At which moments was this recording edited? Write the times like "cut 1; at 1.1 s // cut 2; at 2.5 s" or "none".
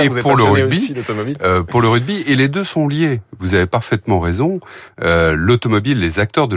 none